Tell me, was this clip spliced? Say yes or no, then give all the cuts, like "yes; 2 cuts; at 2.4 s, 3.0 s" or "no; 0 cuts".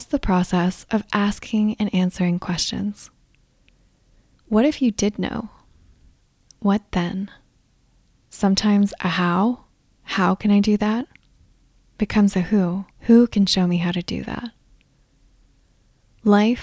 yes; 2 cuts; at 8.2 s, 12.9 s